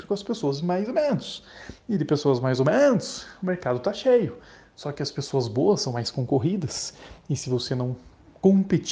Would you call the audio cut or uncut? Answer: uncut